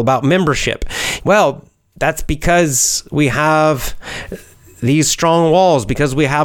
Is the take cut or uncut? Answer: cut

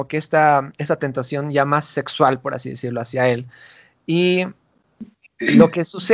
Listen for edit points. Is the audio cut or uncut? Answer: uncut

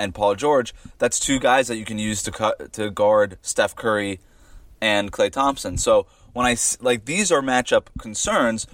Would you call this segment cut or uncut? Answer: uncut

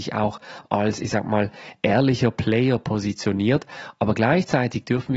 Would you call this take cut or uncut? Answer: uncut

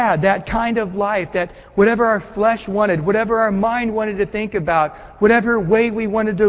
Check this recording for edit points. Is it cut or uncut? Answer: uncut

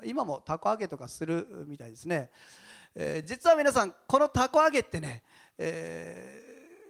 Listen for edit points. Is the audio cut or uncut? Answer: uncut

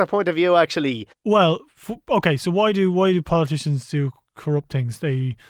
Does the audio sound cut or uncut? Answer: cut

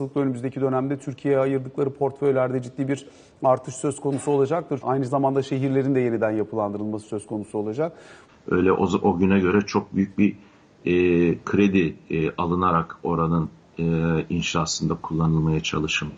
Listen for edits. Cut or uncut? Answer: cut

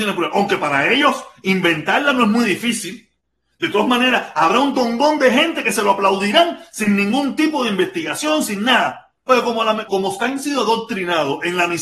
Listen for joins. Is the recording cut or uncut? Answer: cut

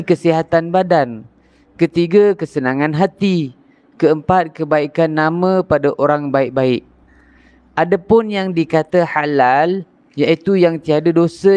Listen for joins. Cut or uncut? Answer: uncut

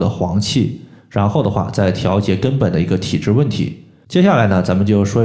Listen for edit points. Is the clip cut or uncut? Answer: uncut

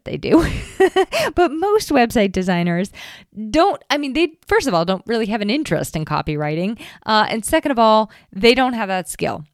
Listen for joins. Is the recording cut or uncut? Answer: uncut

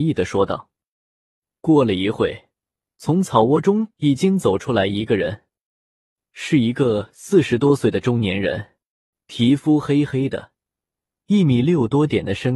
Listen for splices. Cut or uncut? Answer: uncut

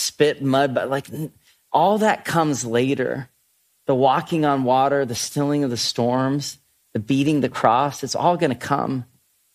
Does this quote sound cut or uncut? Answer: uncut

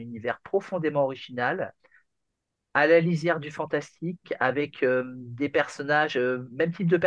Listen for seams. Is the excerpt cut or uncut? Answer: uncut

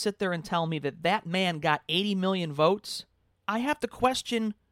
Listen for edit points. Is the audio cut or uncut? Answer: cut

